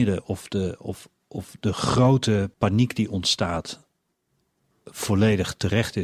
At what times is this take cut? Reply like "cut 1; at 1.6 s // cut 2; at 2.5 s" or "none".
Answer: cut 1; at 2.5 s